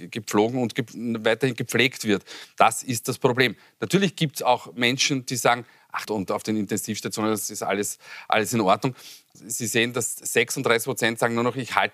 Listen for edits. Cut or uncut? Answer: cut